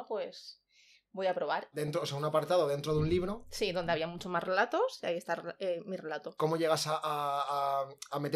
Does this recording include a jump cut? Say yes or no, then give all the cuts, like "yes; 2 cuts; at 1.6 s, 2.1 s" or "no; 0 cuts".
yes; 2 cuts; at 1.7 s, 6.4 s